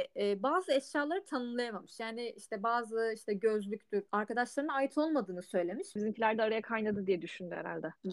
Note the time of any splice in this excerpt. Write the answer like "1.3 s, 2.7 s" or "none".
4.1 s, 6.0 s